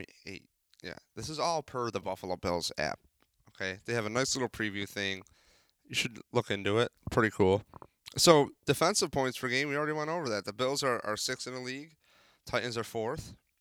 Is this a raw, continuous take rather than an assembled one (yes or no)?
yes